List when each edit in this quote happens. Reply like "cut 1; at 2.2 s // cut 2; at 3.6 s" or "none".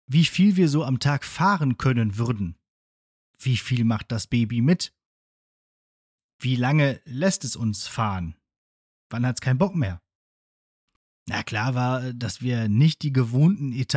none